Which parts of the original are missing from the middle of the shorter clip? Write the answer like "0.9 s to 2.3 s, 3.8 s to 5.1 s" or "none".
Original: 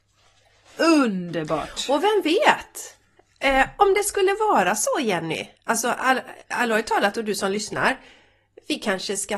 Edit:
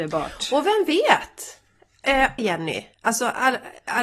3.8 s to 5.0 s